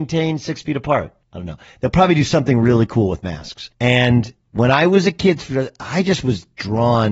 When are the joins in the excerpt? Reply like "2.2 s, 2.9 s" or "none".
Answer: 1.2 s, 3.7 s